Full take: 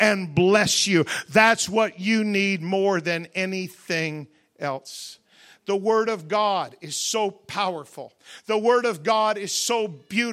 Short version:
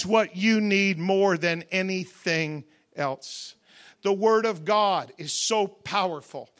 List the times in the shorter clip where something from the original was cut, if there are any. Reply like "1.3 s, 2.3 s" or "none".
none